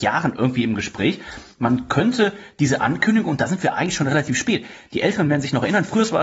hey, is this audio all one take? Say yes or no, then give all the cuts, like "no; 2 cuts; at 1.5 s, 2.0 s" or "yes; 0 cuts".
yes; 0 cuts